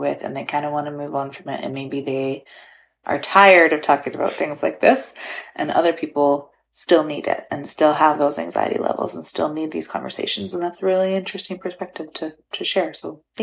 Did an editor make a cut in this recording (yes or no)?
no